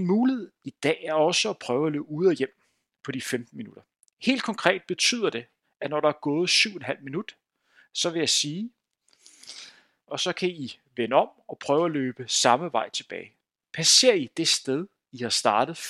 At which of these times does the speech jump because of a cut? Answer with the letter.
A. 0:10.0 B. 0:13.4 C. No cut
A